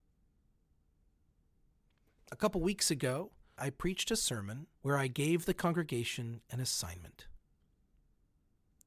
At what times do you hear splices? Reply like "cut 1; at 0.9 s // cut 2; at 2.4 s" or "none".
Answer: cut 1; at 3.6 s // cut 2; at 4.7 s

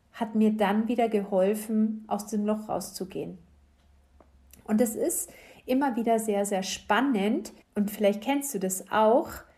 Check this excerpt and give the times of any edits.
cut 1; at 7.6 s

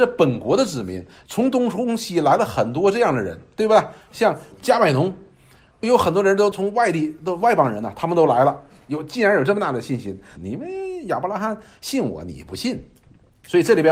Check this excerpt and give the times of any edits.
cut 1; at 10.4 s

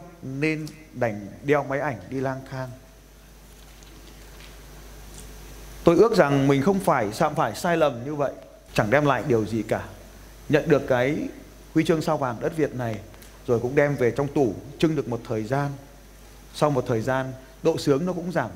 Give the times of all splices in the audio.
cut 1; at 8.7 s

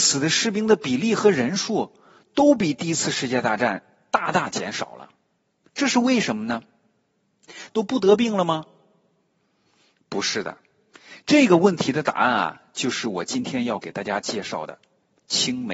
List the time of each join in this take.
cut 1; at 7.7 s

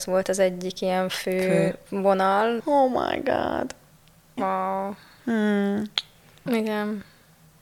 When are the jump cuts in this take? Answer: cut 1; at 2.6 s // cut 2; at 4.4 s // cut 3; at 6.5 s

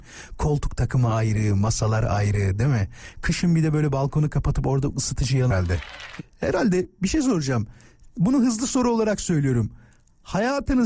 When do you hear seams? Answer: cut 1; at 6.2 s

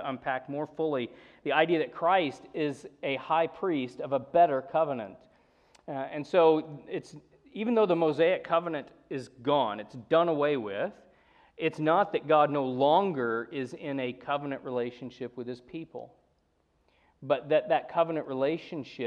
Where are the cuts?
none

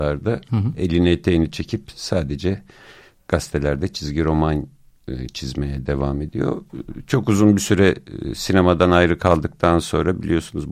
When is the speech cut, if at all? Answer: none

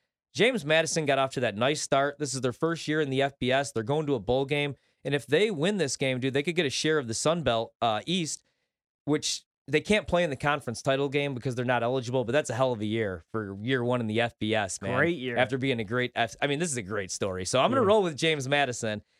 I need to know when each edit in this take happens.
none

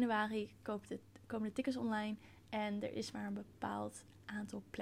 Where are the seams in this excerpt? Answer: none

